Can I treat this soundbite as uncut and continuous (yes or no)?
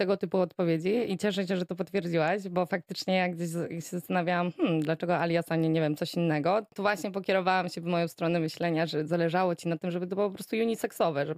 no